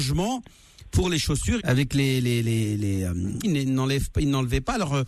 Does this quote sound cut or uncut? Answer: cut